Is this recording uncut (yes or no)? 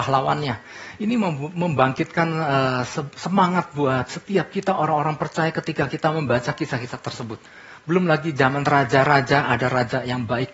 yes